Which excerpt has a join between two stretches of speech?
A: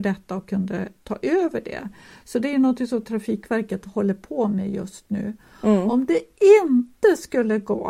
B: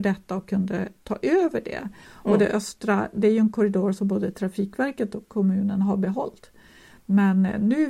B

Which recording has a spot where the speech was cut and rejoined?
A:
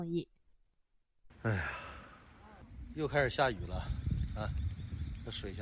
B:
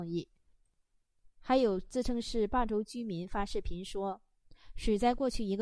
A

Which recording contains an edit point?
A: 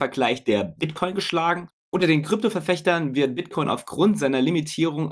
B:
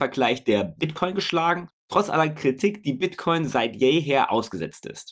B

